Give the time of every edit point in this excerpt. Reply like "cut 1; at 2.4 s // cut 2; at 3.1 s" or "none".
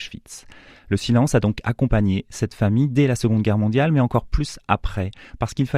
none